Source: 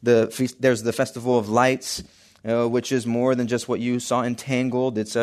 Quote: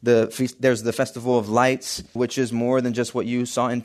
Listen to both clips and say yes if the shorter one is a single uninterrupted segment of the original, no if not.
no